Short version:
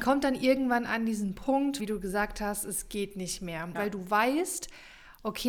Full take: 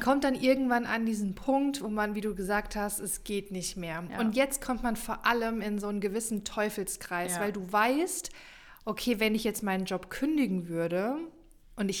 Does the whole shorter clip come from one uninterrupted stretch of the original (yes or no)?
no